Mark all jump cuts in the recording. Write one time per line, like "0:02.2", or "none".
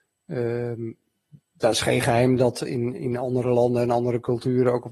0:01.4

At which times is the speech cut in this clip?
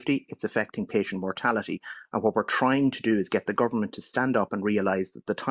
none

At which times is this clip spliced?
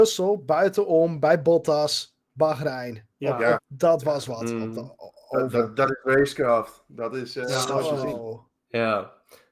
0:03.6

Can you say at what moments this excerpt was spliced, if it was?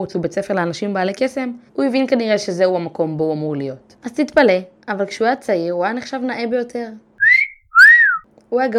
0:01.7
0:04.0

